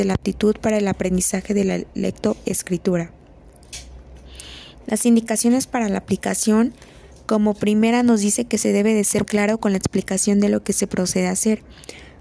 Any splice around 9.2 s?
yes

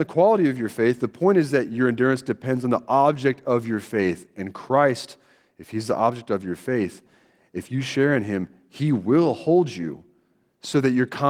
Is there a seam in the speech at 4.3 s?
no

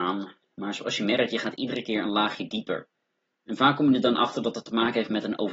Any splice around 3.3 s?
no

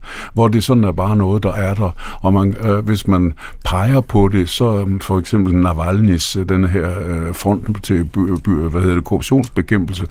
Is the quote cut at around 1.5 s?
no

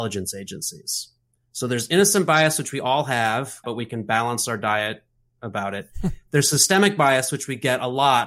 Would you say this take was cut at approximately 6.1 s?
no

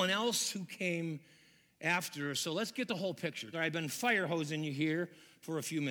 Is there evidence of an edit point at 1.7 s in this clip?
no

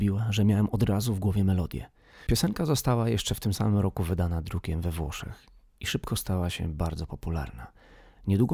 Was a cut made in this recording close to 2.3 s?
yes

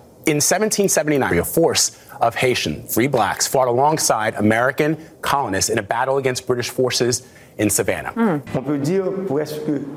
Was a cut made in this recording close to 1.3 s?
yes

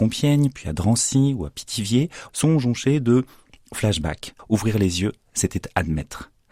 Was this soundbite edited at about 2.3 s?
yes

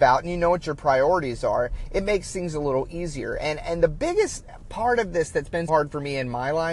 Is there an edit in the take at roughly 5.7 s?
yes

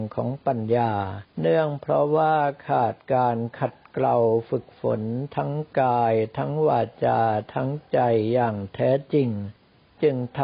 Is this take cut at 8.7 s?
no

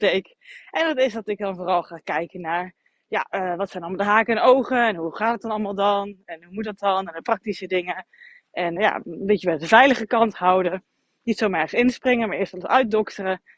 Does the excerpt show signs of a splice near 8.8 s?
yes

